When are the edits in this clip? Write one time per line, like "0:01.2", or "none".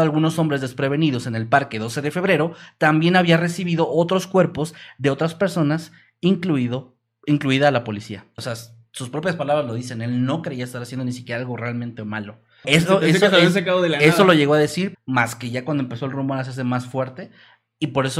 0:08.4
0:12.6
0:14.9